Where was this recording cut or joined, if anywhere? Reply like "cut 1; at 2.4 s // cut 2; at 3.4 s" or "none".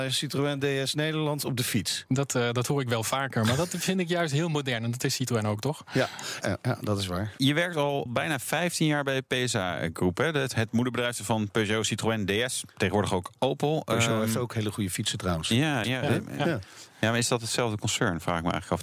cut 1; at 6.4 s // cut 2; at 15.8 s